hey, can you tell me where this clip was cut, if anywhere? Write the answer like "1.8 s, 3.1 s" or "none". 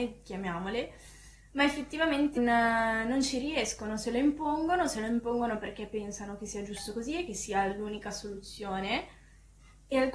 2.4 s